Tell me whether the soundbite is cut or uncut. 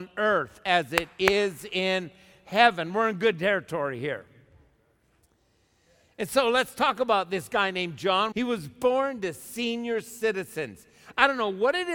cut